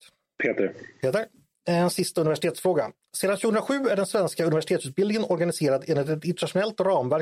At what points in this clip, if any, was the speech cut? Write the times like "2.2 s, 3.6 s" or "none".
1.5 s